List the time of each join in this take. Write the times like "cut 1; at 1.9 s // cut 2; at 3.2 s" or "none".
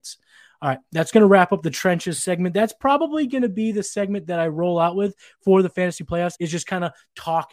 cut 1; at 6.3 s